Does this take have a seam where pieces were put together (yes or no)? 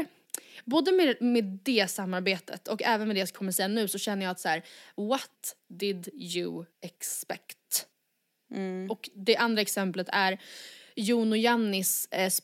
no